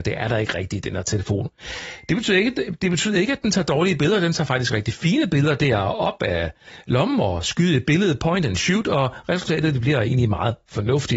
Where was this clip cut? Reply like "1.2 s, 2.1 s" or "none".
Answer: none

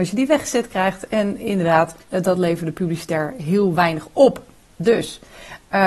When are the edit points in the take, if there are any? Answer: 2.0 s

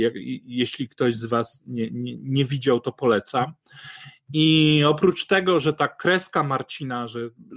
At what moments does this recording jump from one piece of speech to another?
none

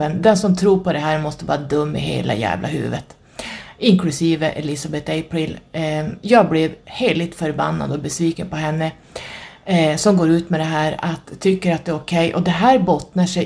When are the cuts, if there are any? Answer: none

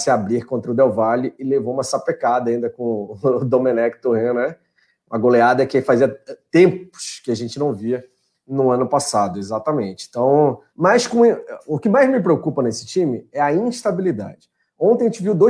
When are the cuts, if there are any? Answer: 10.7 s

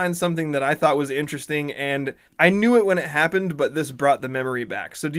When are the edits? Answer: 2.3 s

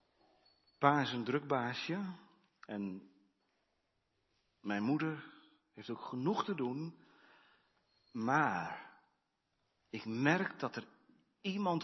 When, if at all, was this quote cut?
none

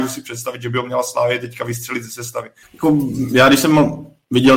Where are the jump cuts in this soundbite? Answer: 2.6 s

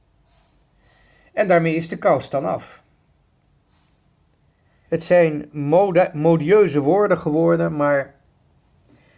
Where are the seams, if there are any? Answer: 4.9 s

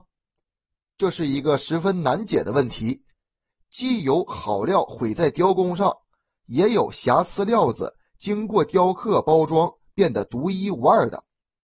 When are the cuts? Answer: none

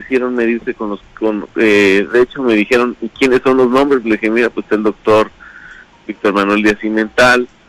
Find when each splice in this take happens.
none

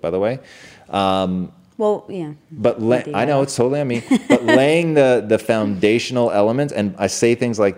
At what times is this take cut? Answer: none

